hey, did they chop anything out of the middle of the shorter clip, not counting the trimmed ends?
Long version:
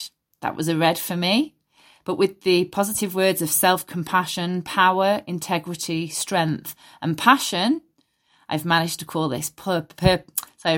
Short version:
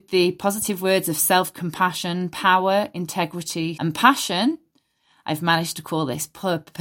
yes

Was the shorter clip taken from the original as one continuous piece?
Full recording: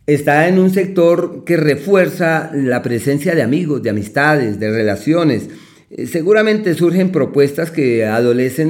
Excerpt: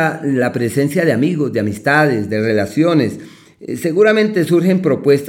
yes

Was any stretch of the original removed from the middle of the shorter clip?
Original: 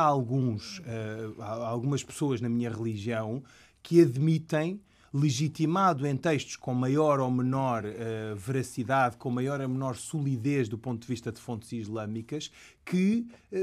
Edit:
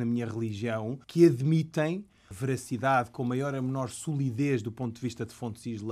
yes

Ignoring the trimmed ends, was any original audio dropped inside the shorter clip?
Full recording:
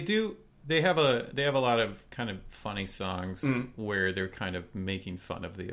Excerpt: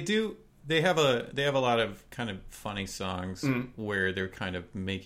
no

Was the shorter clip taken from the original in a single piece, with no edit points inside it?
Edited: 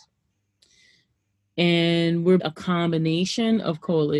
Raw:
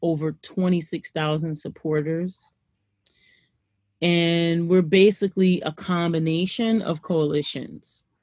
no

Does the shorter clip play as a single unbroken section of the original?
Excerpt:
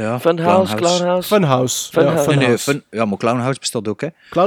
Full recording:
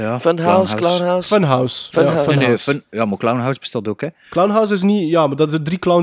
yes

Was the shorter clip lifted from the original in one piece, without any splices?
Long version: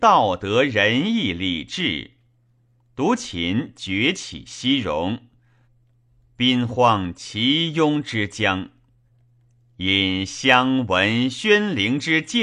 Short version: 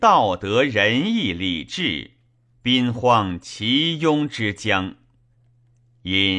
no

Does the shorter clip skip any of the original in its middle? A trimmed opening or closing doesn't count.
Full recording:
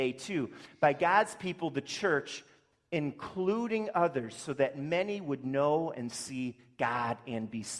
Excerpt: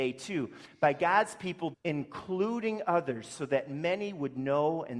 yes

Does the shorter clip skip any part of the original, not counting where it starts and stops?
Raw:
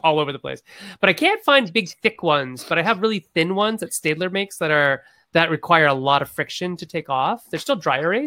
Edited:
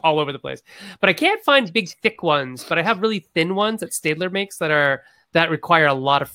no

